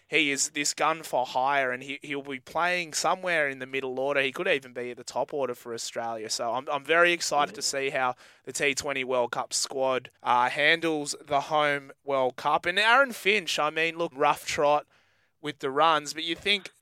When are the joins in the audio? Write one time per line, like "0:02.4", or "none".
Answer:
0:10.2
0:14.1